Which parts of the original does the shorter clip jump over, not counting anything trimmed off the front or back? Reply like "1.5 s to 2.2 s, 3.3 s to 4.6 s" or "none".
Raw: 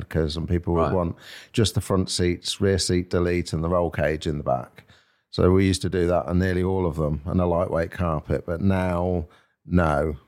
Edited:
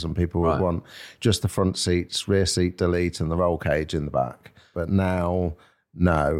5.1 s to 8.4 s